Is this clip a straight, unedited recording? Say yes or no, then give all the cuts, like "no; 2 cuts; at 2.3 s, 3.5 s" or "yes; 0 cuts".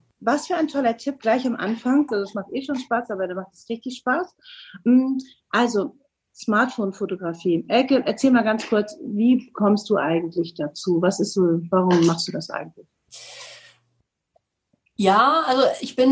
no; 1 cut; at 2.1 s